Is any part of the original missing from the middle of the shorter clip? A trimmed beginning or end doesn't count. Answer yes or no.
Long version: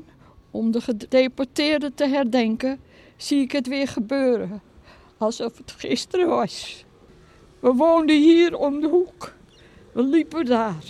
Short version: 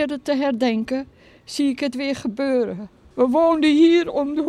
yes